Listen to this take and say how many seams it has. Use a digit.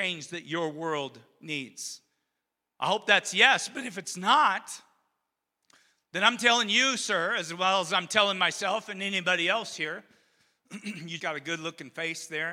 1